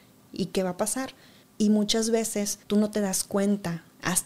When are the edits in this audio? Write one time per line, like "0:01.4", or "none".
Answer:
0:01.4
0:02.6